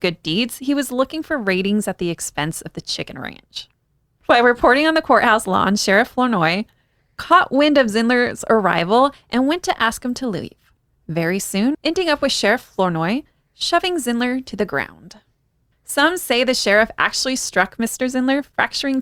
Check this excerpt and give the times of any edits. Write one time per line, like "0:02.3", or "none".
0:11.7